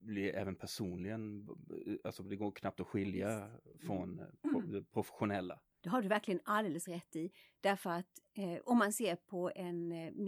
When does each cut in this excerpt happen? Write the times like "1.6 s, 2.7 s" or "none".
none